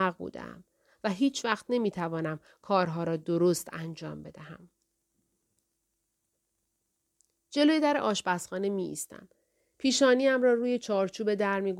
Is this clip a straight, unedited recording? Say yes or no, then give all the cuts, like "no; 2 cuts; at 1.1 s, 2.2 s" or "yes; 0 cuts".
yes; 0 cuts